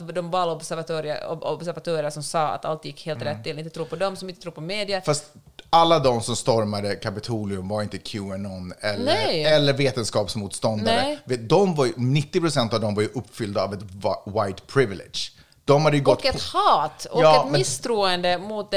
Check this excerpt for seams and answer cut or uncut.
uncut